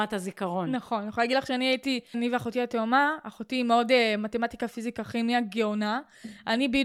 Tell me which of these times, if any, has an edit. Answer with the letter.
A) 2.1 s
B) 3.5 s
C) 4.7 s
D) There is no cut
A